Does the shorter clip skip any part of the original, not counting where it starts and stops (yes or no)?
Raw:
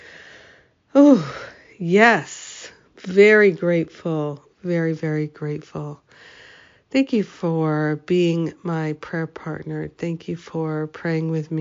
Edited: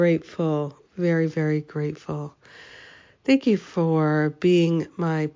no